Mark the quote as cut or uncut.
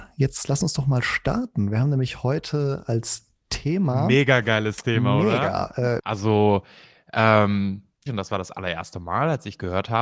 cut